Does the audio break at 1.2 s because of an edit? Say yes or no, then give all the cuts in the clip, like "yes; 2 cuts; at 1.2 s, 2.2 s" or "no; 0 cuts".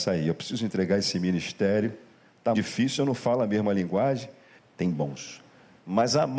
no; 2 cuts; at 2.5 s, 4.6 s